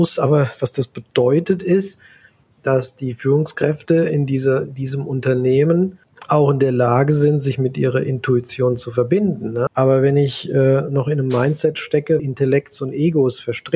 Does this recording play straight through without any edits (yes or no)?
no